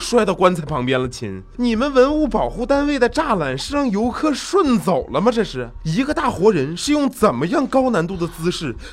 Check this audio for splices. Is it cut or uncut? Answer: uncut